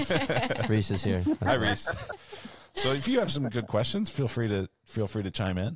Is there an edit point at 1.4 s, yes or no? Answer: no